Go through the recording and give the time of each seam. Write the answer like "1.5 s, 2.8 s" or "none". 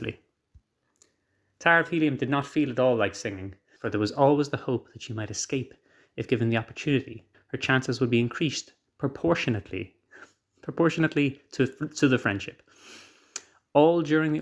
3.8 s, 7.3 s